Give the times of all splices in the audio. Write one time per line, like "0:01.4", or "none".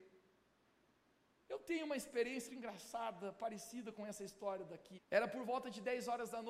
0:02.5
0:04.9